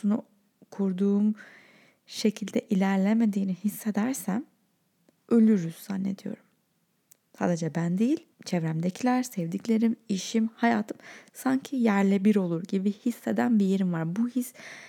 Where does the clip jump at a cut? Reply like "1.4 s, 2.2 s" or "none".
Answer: 8.3 s